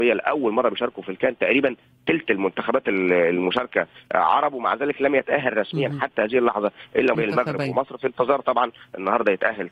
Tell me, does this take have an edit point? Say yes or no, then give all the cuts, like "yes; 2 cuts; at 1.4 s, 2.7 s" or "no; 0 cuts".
yes; 1 cut; at 7.2 s